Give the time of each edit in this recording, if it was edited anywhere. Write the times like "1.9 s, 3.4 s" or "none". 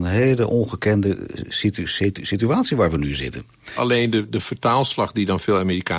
3.8 s